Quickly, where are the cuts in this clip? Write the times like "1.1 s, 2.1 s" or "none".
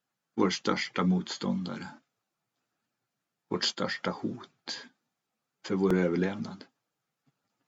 none